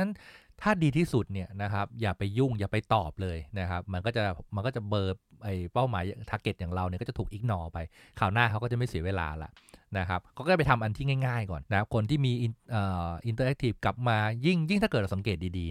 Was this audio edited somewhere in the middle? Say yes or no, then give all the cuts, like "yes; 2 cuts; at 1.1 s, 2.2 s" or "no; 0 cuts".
yes; 1 cut; at 11.6 s